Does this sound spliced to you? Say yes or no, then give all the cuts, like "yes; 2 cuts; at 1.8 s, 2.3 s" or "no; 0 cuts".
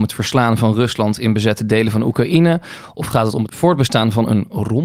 no; 0 cuts